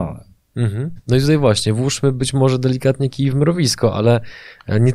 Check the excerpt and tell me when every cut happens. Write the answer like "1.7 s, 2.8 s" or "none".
1.0 s

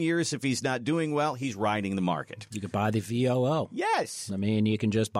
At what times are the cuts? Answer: none

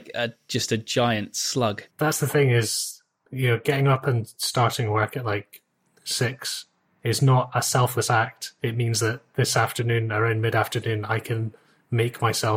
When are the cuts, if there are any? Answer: 1.9 s

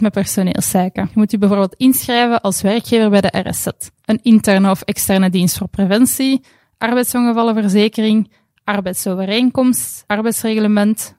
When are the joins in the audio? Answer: 4.0 s

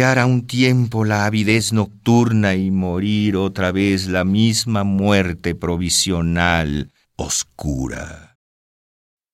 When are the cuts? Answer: 7.0 s

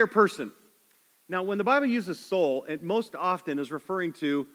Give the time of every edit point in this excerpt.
none

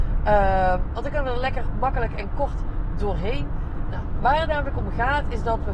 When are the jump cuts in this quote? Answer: 3.9 s

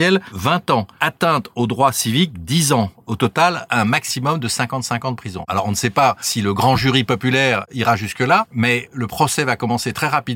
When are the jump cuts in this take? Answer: none

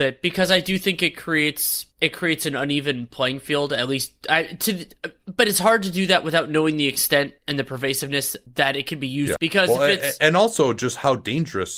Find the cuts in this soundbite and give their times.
9.4 s

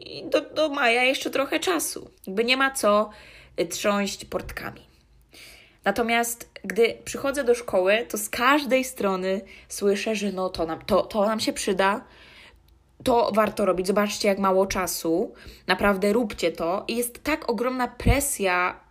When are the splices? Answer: 2.2 s

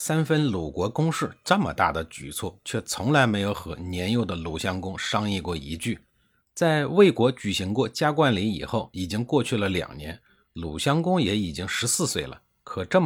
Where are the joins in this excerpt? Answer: none

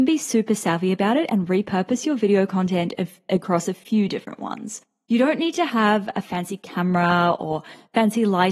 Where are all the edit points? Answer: 5.1 s

